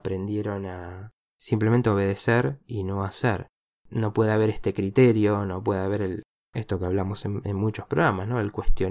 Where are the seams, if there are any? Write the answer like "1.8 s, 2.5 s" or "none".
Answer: 3.7 s